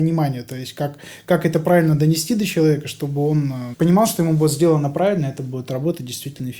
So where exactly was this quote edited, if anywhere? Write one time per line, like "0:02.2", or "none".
0:03.7